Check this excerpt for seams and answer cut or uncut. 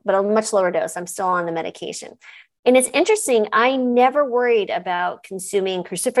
uncut